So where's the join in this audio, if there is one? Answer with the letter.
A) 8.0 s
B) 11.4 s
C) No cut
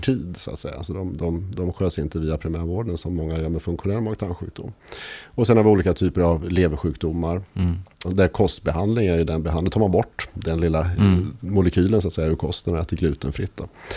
A